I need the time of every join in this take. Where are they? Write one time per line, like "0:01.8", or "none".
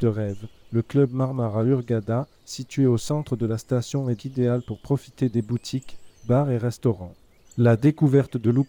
0:04.2
0:07.4